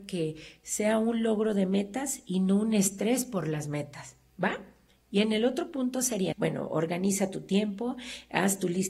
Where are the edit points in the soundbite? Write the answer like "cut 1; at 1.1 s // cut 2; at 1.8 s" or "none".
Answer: cut 1; at 6.3 s